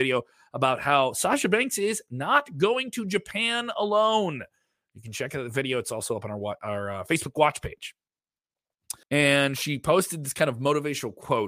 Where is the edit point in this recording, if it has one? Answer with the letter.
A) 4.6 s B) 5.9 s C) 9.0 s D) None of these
C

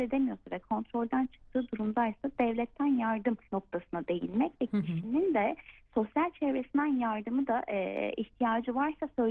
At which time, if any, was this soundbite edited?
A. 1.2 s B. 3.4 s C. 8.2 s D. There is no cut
B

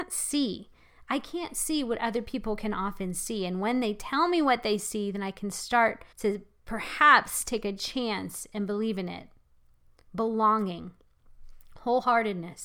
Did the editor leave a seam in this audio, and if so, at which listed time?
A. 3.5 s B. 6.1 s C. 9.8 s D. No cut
B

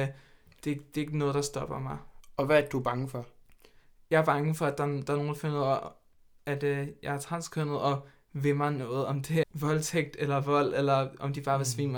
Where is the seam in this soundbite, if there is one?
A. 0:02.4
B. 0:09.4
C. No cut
B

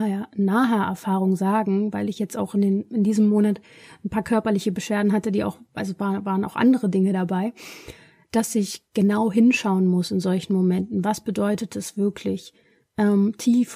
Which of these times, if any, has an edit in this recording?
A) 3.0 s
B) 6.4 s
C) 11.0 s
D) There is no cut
D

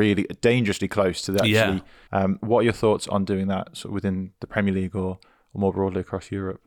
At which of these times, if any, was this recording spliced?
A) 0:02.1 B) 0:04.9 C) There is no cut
A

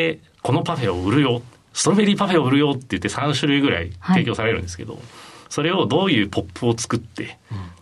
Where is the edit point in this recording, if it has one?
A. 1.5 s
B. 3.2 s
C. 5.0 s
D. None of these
D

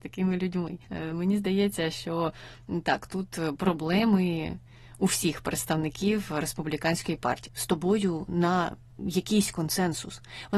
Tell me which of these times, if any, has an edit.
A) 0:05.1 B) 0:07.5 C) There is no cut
B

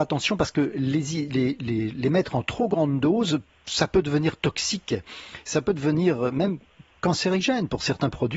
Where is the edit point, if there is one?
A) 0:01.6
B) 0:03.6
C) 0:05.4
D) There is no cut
D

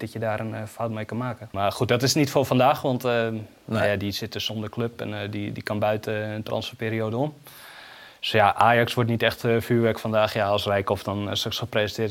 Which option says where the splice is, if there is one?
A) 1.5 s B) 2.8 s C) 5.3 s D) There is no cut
A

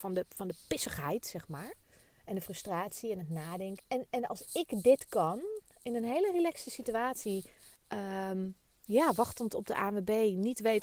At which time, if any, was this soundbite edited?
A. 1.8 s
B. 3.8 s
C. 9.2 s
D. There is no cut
B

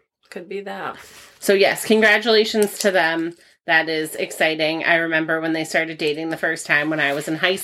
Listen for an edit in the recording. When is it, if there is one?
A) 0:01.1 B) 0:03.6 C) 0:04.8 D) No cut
D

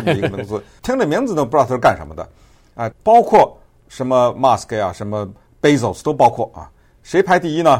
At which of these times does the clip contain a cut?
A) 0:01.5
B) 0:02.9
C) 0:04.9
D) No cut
B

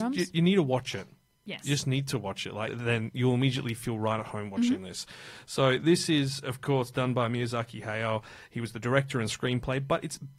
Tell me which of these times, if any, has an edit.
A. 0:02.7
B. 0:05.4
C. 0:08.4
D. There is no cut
A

